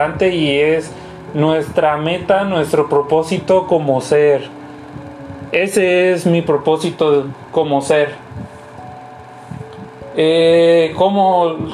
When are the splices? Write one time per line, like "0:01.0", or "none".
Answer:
0:05.5